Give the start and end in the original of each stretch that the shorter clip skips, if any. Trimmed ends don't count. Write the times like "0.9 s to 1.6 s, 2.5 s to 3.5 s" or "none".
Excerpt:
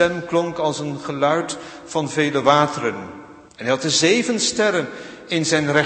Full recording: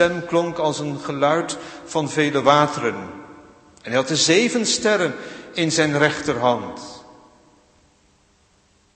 3.5 s to 3.7 s